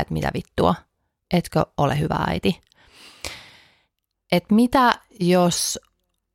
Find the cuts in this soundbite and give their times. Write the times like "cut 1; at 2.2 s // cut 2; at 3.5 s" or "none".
cut 1; at 4.1 s